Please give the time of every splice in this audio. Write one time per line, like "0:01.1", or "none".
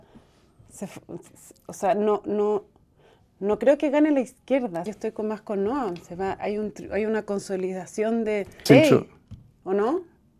0:04.9
0:06.4
0:08.7

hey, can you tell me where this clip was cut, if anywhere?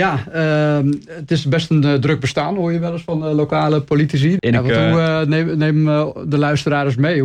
0:04.4

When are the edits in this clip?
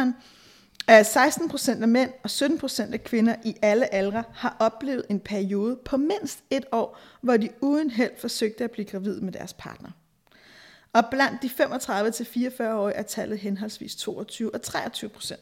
none

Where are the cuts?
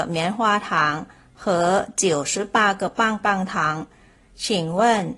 none

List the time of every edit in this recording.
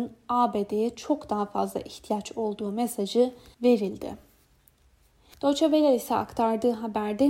none

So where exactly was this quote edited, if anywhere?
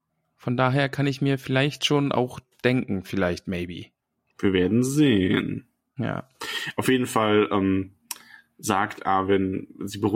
none

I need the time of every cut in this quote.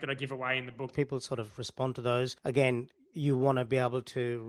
0:00.9

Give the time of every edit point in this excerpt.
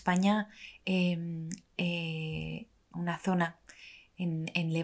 0:02.9

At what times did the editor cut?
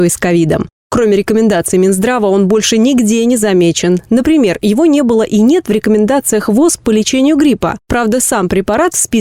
none

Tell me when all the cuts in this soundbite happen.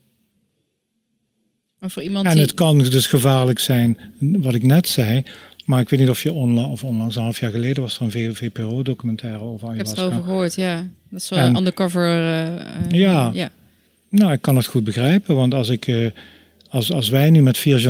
none

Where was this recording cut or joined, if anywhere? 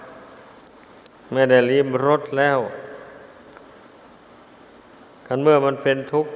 none

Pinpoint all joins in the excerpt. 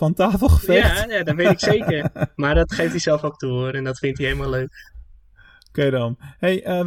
none

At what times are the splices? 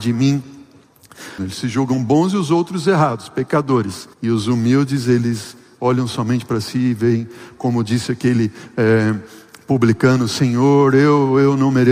0:01.4
0:04.1

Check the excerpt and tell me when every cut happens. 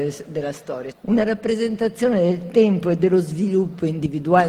0:00.9

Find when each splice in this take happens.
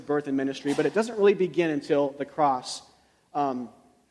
none

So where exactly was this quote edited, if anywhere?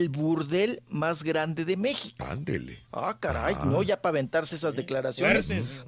0:02.9

